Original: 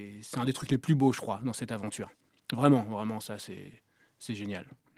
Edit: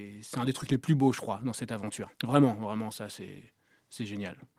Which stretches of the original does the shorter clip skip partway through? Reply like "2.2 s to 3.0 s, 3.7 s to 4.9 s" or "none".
2.1 s to 2.4 s